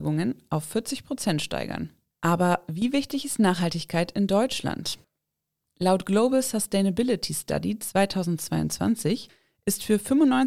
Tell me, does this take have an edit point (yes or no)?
yes